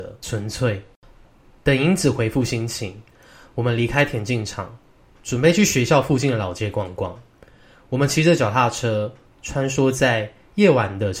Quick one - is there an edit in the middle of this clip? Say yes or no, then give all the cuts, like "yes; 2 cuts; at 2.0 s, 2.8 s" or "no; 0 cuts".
no; 0 cuts